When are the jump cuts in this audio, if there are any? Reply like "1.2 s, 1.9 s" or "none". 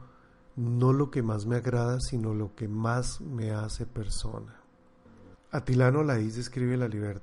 5.3 s